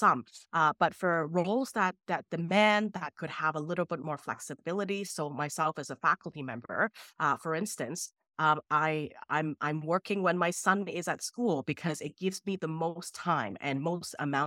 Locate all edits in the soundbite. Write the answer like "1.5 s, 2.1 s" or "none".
none